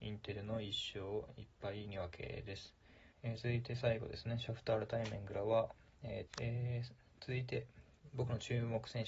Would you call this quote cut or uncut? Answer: cut